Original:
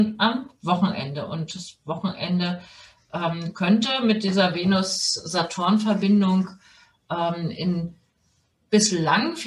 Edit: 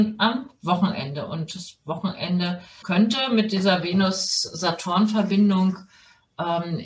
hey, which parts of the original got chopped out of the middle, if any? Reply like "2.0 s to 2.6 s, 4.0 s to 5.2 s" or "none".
2.8 s to 3.5 s